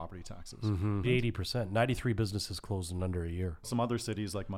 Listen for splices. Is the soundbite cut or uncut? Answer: cut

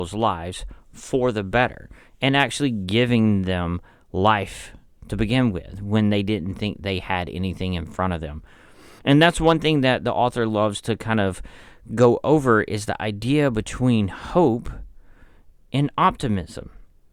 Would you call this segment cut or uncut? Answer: cut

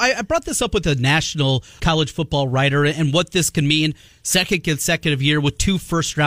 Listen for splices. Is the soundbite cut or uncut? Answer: cut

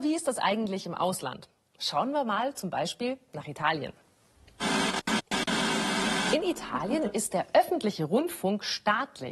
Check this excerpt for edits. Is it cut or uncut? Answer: uncut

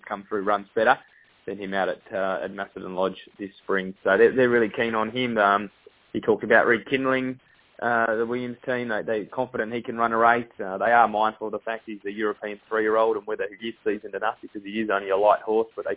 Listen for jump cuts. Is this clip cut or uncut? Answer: uncut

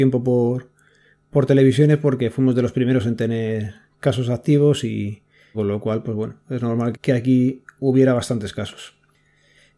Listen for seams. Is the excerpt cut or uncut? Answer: cut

